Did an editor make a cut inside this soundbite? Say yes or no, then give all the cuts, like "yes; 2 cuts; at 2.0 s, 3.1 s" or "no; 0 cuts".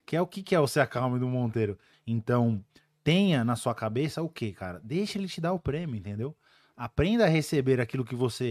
yes; 1 cut; at 1.9 s